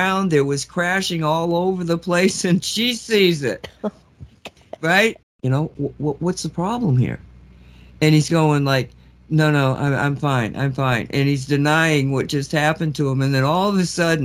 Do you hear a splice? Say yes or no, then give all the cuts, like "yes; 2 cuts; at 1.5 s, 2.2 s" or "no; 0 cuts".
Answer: yes; 1 cut; at 5.2 s